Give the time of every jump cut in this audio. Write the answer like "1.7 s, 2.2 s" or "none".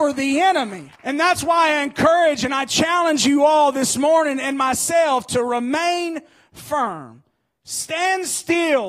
0.9 s